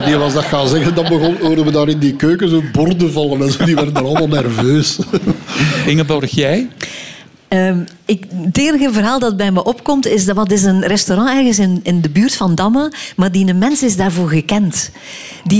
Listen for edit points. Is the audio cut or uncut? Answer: uncut